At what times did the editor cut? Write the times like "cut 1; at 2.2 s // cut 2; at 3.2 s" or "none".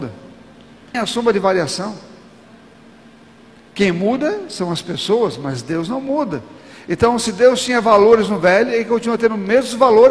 cut 1; at 0.9 s

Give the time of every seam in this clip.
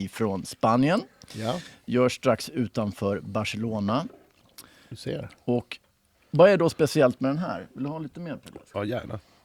none

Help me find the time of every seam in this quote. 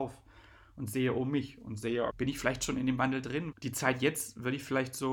cut 1; at 2.1 s // cut 2; at 3.5 s

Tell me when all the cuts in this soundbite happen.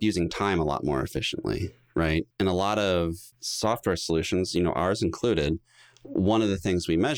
none

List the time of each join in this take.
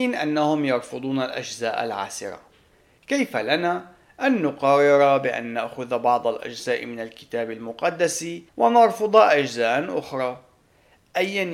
cut 1; at 3.0 s // cut 2; at 8.5 s

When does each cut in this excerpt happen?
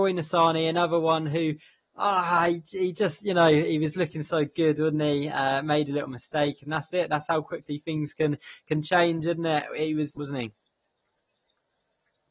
cut 1; at 10.2 s

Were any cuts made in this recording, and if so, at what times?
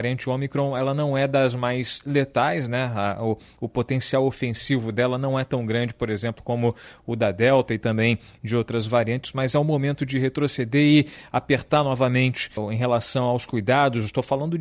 cut 1; at 12.6 s

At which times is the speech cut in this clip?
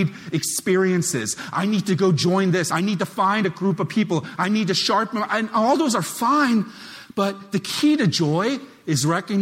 cut 1; at 2.7 s

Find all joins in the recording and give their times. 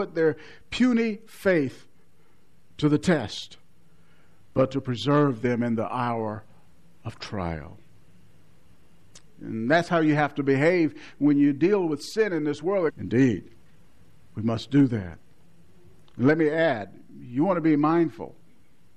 cut 1; at 9.2 s // cut 2; at 12.9 s

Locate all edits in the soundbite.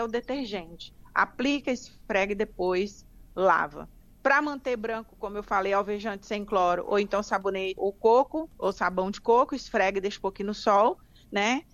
cut 1; at 7.8 s

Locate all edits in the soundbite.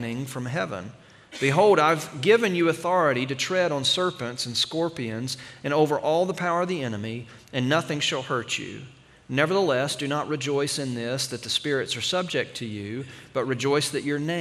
none

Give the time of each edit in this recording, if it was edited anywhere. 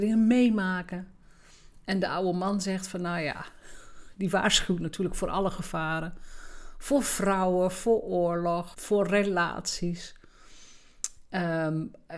cut 1; at 8.7 s

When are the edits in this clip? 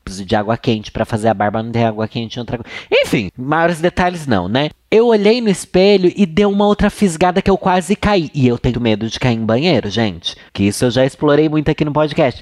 cut 1; at 3.3 s // cut 2; at 8.7 s // cut 3; at 10.5 s

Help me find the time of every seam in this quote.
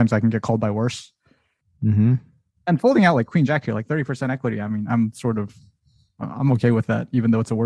none

